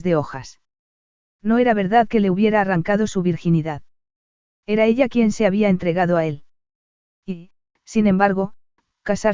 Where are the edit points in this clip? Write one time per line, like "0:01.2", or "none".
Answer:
none